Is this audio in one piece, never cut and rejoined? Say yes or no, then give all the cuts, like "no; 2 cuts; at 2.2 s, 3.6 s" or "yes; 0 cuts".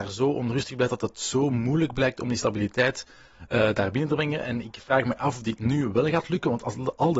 yes; 0 cuts